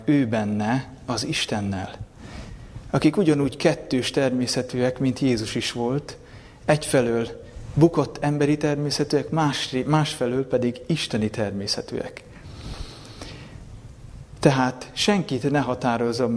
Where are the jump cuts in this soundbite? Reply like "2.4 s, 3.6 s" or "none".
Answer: none